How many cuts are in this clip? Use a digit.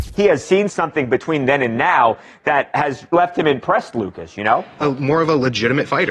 2